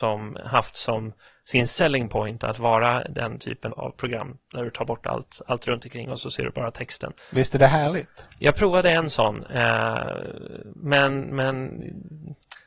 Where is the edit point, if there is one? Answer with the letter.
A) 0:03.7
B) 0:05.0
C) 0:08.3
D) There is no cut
A